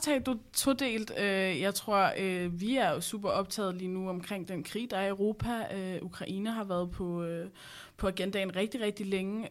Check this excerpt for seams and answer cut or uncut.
uncut